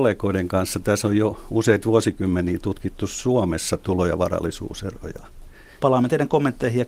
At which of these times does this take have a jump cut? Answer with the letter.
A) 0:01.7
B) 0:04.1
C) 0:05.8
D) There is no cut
C